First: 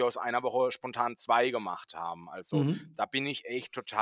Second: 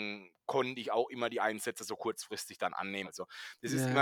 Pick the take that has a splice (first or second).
second